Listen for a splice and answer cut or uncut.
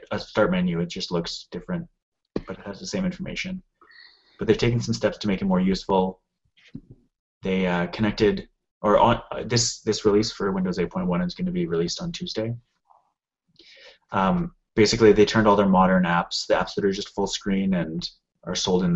uncut